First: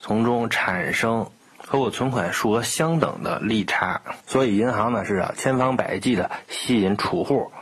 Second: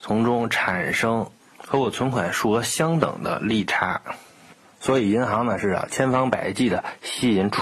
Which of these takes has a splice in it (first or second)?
first